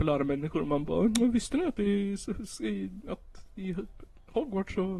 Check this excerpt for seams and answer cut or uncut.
uncut